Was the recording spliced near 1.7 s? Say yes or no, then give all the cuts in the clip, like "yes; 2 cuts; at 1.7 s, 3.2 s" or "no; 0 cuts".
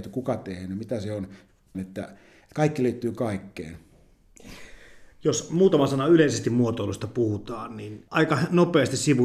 yes; 1 cut; at 1.7 s